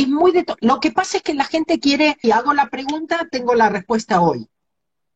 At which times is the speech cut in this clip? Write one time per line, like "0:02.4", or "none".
0:02.2